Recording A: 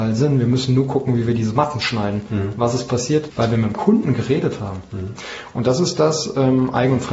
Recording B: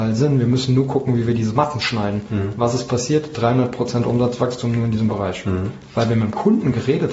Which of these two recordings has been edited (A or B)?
A